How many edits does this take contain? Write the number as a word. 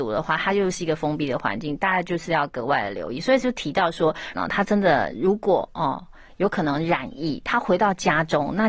one